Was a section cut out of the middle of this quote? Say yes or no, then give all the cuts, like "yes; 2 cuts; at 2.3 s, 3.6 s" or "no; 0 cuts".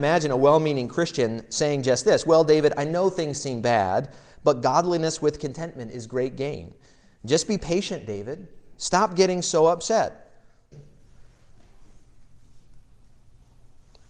yes; 1 cut; at 10.7 s